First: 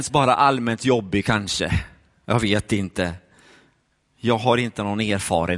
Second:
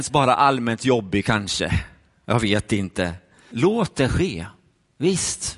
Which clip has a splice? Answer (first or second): second